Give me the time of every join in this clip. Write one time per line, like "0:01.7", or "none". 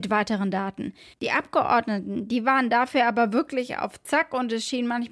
none